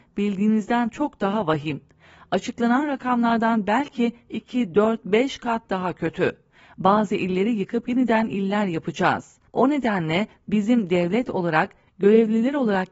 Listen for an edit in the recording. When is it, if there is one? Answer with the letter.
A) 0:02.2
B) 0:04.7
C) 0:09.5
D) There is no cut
C